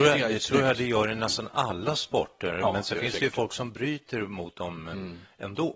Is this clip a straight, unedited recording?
yes; 0 cuts

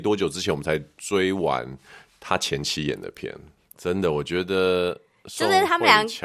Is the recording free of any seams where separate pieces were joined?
no; 1 cut; at 3.7 s

